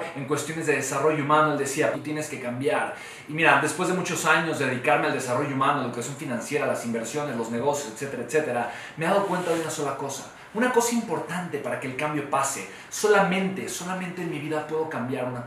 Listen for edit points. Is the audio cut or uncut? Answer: cut